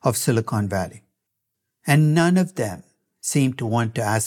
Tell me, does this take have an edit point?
no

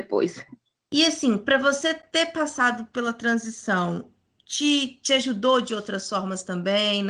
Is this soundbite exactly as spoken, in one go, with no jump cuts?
yes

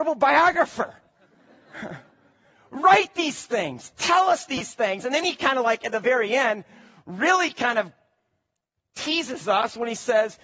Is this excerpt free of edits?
yes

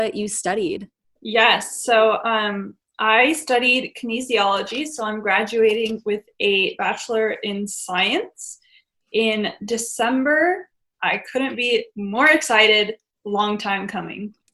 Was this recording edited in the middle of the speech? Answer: no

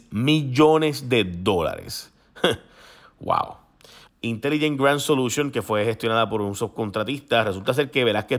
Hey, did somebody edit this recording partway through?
yes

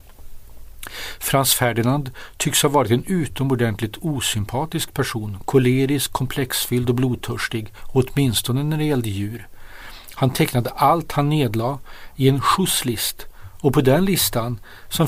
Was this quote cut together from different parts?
no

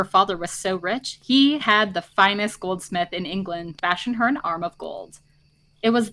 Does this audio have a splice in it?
yes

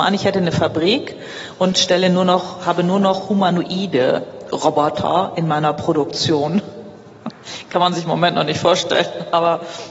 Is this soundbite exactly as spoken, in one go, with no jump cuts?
yes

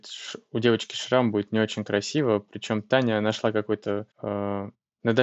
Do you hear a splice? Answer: yes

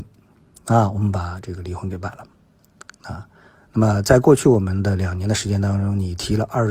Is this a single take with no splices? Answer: yes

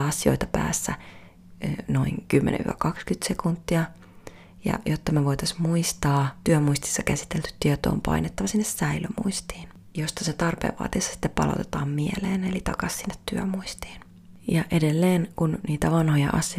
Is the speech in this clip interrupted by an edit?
no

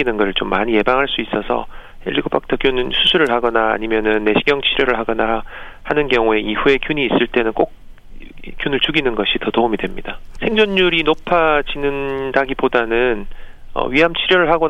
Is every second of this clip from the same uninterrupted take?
no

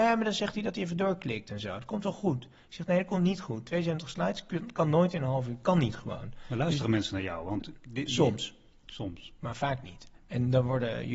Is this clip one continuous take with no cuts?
yes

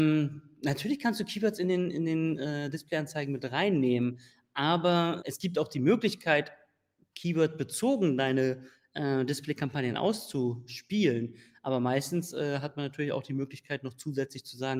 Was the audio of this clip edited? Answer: yes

